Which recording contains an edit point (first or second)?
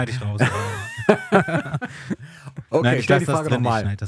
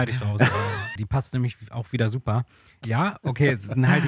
second